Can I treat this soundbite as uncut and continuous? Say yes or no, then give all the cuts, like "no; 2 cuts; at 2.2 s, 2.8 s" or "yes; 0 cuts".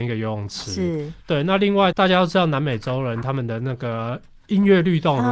no; 1 cut; at 1.9 s